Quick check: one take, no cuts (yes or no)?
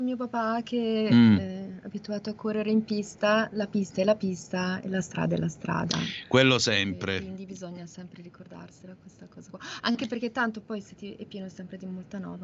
yes